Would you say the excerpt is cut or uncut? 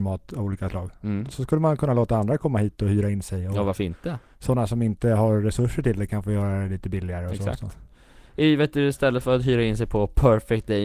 uncut